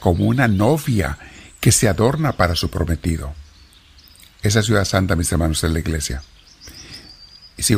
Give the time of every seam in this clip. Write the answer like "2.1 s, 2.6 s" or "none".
none

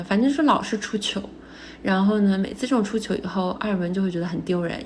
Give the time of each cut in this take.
none

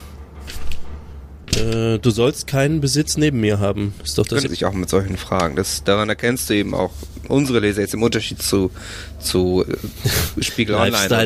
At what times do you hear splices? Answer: 4.5 s

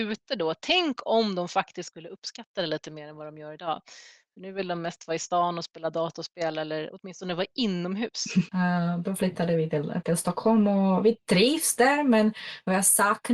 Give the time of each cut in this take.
8.5 s

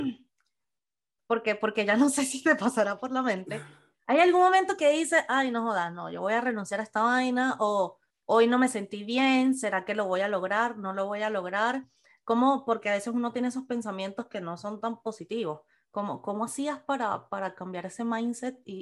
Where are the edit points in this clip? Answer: none

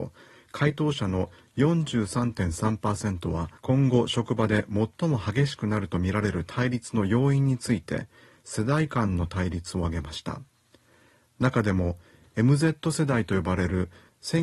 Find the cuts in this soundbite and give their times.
3.6 s

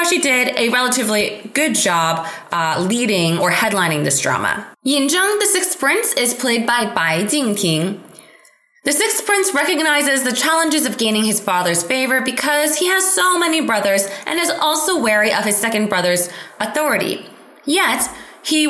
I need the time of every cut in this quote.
4.7 s

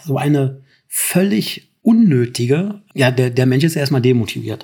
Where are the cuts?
2.9 s

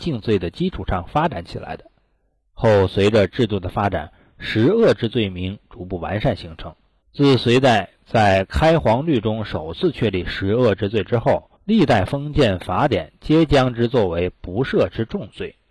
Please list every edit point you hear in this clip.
7.0 s, 11.6 s

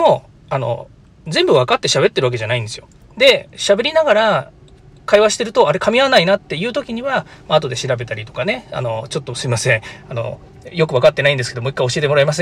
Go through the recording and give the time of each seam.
3.0 s

